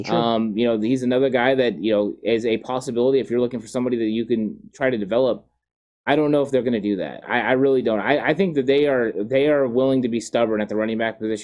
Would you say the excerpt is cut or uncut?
uncut